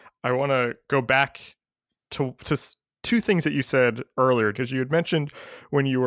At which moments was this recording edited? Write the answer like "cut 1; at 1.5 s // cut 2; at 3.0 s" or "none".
cut 1; at 4.5 s